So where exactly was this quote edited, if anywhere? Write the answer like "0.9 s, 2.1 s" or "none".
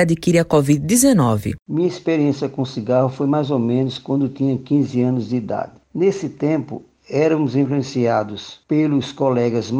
1.6 s